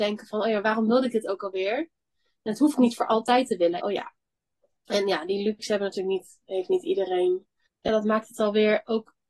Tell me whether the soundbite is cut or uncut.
cut